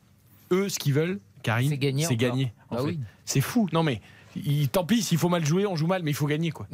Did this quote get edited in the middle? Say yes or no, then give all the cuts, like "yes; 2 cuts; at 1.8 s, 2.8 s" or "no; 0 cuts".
no; 0 cuts